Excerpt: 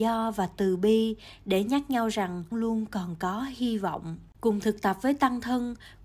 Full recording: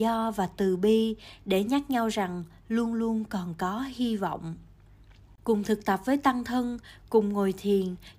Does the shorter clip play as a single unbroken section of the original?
no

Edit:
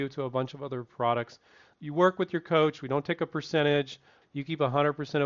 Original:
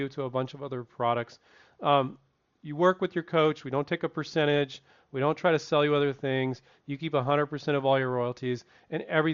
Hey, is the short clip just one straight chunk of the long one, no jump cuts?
no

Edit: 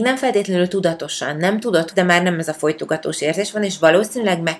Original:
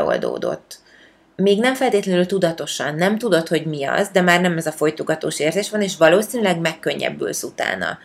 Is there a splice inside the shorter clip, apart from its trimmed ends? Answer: yes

